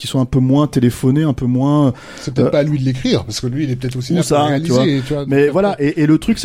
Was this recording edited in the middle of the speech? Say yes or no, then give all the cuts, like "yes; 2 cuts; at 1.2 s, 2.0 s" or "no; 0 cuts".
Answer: no; 0 cuts